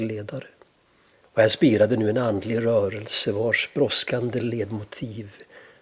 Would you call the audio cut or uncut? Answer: cut